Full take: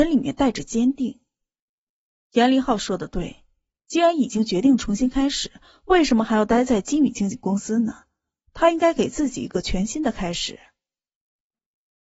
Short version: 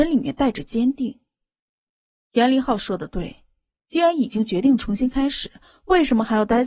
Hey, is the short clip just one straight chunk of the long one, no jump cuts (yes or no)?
yes